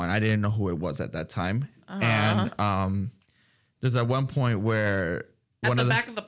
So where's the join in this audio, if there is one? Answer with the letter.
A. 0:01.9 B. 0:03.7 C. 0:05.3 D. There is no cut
D